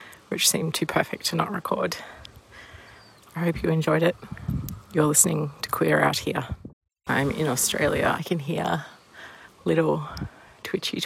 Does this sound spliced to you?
yes; 2 cuts; at 7.1 s, 8.2 s

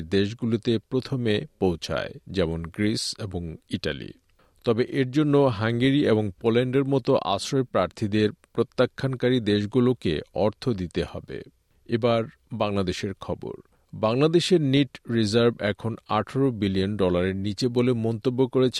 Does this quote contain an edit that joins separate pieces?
no; 0 cuts

